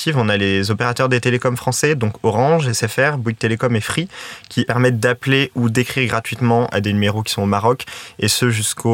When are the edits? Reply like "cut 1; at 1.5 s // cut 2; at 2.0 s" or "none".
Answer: none